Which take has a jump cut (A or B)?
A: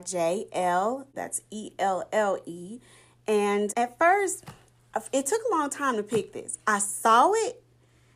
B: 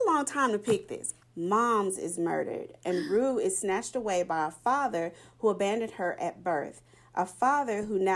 B